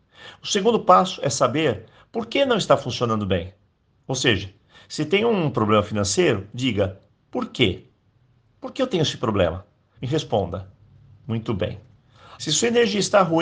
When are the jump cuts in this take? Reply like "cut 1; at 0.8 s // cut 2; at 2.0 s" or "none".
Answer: cut 1; at 10.0 s // cut 2; at 12.4 s